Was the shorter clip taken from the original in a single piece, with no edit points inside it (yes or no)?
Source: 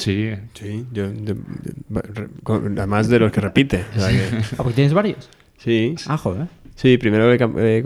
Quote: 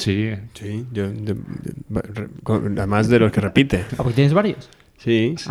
no